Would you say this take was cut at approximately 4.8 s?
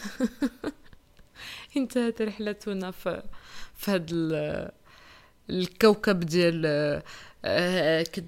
no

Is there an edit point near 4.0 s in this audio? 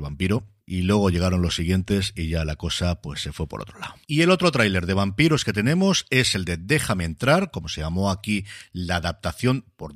yes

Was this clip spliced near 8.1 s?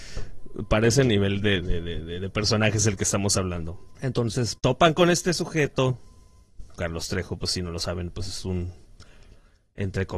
no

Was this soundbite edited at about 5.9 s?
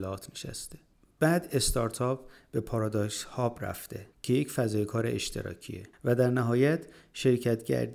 yes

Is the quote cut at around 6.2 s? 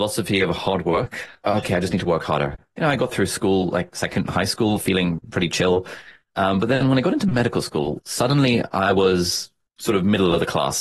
no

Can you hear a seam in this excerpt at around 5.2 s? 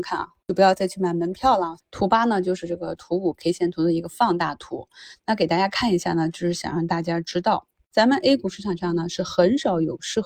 no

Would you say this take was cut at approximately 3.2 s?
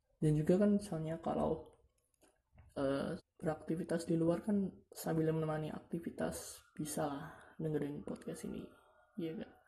yes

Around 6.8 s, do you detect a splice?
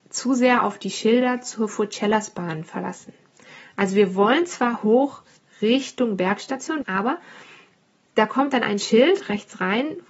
yes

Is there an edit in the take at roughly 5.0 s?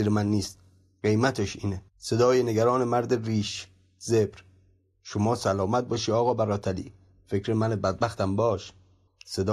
no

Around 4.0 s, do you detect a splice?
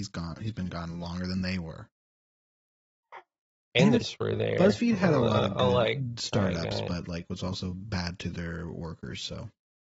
yes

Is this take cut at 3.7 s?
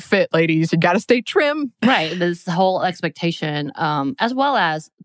no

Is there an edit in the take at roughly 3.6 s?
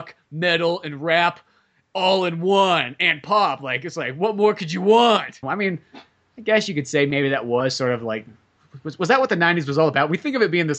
no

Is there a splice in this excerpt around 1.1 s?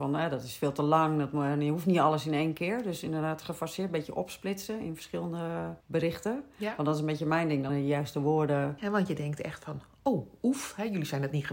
no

